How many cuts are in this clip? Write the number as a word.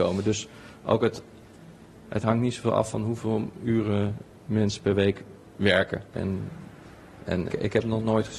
three